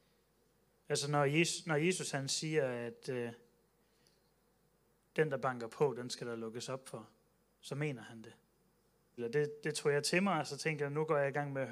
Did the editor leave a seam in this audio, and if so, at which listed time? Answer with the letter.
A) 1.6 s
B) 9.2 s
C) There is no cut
B